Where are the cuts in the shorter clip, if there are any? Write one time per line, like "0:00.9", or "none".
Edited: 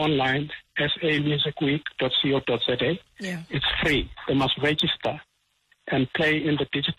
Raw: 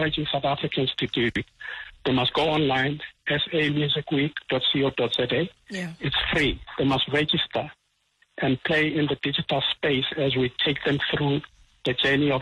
none